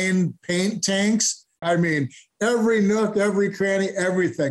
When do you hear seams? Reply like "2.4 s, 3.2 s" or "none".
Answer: 1.6 s